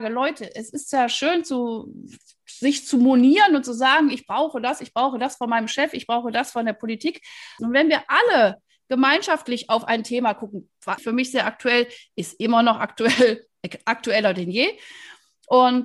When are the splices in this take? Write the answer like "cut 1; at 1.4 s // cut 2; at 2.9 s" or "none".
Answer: cut 1; at 7.6 s // cut 2; at 11.0 s